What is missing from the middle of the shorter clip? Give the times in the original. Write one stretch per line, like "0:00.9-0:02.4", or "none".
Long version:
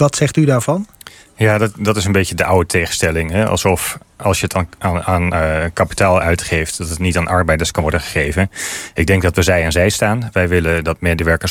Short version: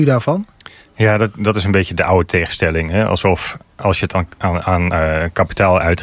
none